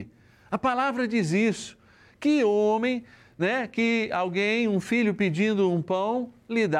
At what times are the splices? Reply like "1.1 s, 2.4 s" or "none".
none